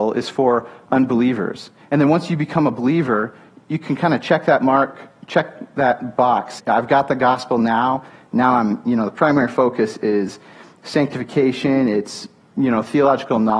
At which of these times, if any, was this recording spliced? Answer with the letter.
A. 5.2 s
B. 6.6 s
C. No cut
B